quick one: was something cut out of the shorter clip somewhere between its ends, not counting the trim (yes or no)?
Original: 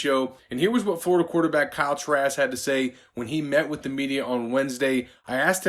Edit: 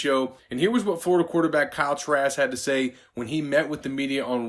no